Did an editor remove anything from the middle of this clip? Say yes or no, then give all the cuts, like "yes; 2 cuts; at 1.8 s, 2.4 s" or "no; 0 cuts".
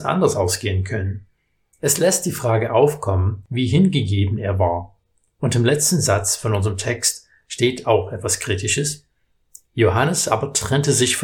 yes; 1 cut; at 1.7 s